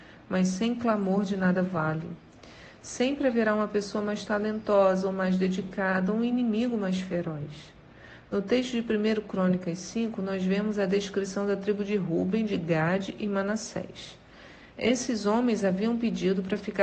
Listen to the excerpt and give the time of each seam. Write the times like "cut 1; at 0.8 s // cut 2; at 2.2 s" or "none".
none

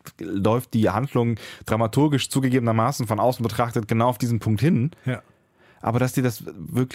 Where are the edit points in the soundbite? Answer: none

